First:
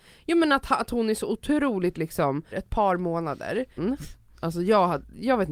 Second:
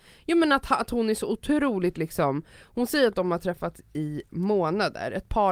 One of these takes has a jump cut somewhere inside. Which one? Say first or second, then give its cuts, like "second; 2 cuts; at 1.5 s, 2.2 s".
first; 2 cuts; at 2.5 s, 3.8 s